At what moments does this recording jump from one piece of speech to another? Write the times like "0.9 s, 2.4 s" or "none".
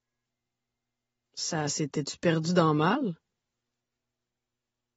none